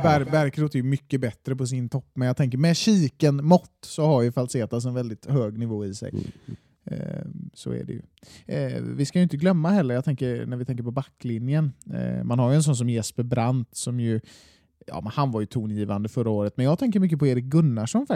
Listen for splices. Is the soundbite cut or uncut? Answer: uncut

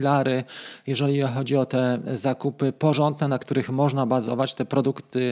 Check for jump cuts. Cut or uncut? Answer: uncut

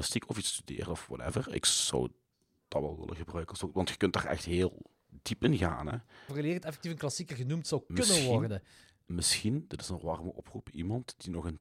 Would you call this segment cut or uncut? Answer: cut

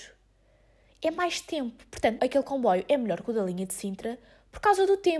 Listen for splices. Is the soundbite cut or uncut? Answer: cut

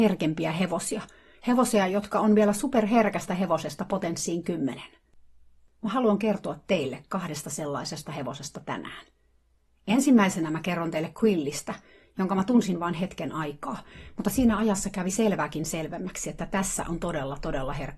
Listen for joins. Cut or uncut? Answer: uncut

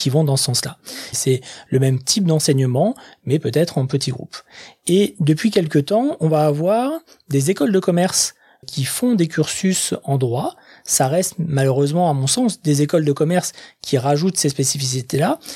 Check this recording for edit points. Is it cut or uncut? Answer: cut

